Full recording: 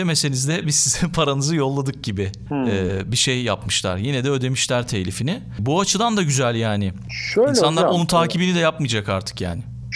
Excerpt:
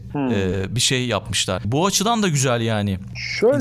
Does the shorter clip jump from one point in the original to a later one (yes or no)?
yes